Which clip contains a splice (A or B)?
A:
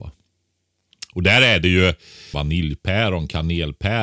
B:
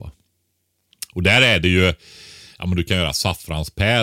A